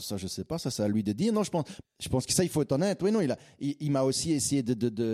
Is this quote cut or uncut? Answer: cut